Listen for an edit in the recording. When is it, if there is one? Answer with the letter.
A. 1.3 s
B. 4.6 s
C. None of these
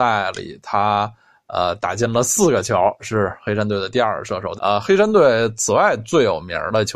B